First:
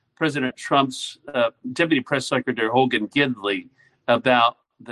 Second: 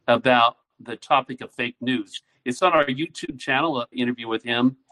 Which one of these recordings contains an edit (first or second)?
second